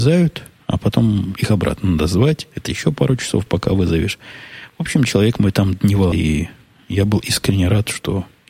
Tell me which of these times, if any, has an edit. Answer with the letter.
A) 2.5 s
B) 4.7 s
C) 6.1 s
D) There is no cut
C